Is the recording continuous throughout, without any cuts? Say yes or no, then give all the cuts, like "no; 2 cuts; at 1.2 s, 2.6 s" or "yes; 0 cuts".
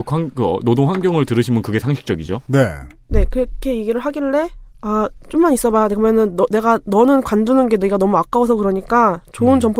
yes; 0 cuts